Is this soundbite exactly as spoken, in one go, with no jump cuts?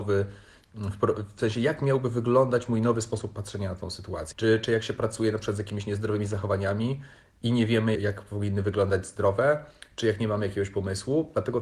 no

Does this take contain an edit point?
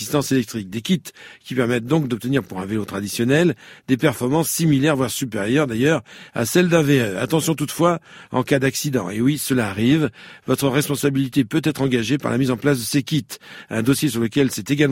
no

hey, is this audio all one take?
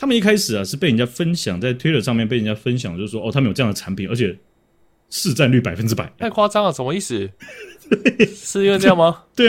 no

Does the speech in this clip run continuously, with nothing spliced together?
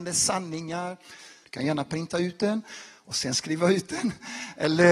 no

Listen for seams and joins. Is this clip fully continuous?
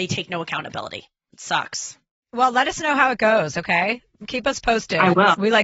no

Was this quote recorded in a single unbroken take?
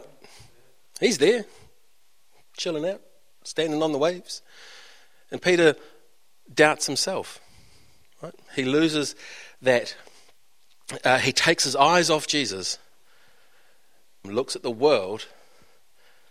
no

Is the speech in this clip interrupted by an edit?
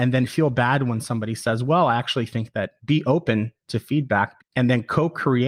yes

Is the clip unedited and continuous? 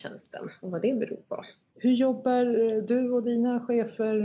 no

